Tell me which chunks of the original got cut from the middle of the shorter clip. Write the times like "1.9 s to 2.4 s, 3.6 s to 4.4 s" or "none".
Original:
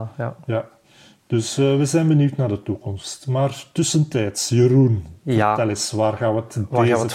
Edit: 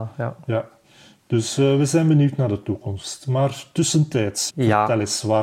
4.5 s to 5.2 s